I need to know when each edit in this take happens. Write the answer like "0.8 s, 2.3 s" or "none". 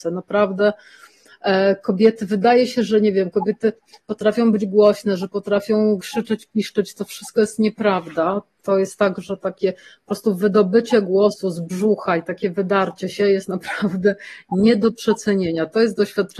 6.0 s

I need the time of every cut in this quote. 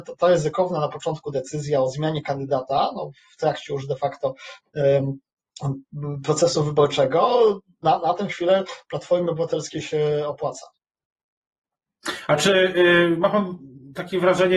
none

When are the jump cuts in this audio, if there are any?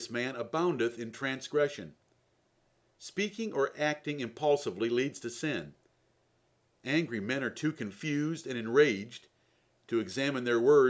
none

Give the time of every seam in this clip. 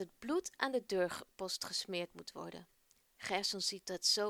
none

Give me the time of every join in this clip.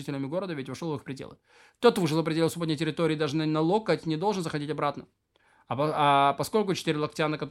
none

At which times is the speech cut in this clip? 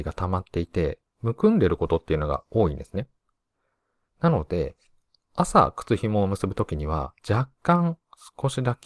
4.0 s, 7.2 s

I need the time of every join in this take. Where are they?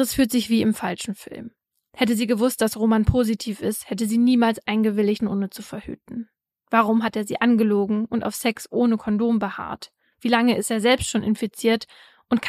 5.2 s

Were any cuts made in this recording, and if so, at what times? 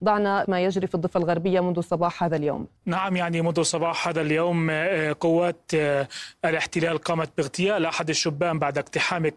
2.8 s

